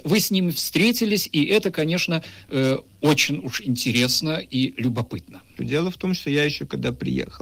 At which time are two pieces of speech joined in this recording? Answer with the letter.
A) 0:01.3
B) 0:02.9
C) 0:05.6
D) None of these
C